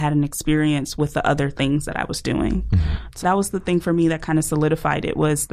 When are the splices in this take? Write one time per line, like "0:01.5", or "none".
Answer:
0:03.2